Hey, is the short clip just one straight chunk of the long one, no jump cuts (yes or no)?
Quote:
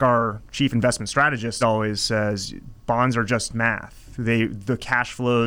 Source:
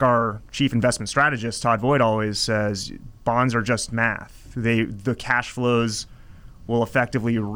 no